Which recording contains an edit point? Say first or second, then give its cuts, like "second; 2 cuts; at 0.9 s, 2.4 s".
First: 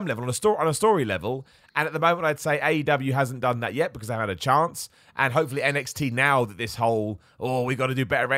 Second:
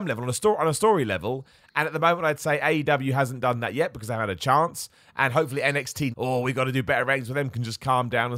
second; 1 cut; at 6.1 s